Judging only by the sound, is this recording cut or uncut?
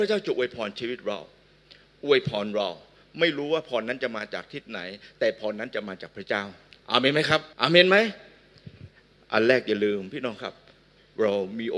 cut